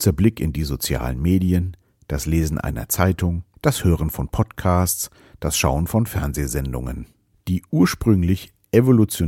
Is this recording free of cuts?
no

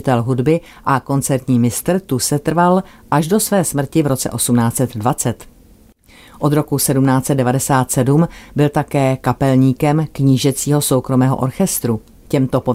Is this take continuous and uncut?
yes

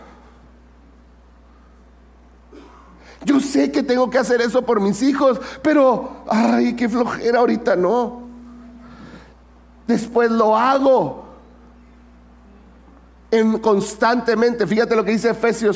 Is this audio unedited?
yes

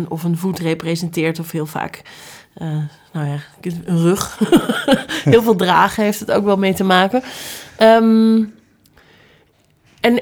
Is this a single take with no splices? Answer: yes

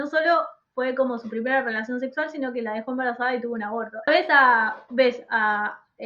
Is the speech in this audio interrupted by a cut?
yes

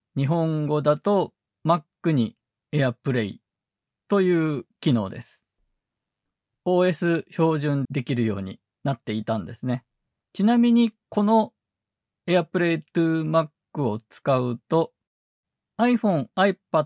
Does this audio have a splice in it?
yes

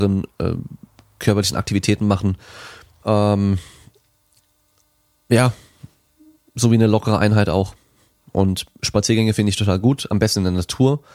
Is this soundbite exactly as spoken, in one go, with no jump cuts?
no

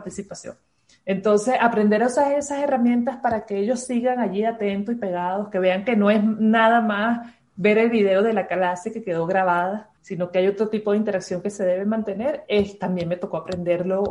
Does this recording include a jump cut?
yes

